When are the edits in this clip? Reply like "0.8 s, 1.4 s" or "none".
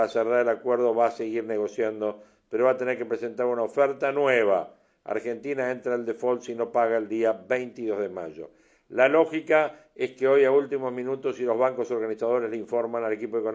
none